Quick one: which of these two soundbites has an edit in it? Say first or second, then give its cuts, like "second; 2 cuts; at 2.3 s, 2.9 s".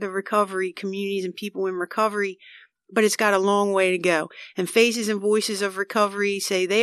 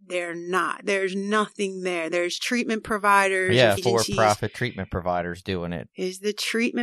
second; 2 cuts; at 3.8 s, 5.9 s